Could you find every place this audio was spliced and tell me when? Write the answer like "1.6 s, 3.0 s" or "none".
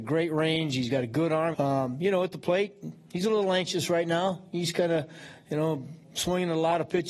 1.5 s